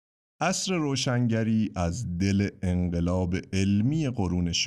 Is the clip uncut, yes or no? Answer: yes